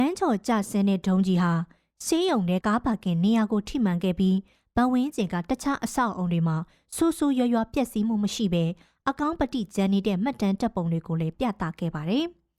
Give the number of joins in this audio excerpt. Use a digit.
1